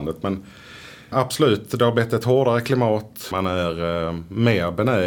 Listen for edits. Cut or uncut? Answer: cut